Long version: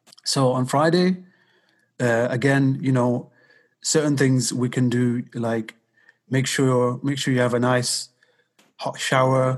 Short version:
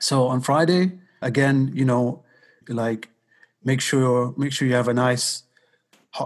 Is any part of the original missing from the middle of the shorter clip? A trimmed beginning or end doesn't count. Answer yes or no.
yes